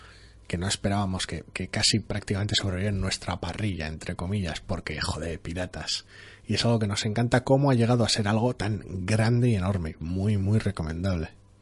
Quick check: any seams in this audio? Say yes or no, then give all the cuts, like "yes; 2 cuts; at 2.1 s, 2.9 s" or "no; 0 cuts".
no; 0 cuts